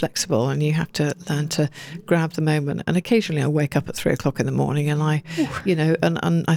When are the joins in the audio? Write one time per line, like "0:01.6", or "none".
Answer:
none